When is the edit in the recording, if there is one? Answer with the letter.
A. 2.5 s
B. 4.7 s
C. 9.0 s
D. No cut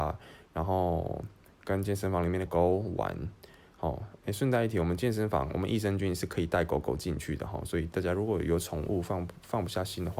A